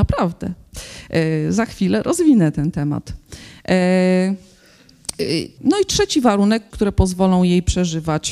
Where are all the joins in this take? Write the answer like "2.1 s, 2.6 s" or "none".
5.6 s, 6.7 s